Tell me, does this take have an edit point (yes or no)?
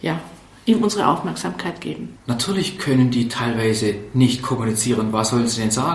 yes